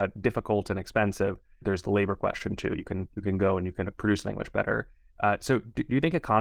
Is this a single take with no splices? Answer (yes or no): no